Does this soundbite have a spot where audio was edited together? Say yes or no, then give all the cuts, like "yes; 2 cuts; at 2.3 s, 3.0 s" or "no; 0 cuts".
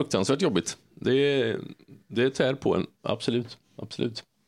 no; 0 cuts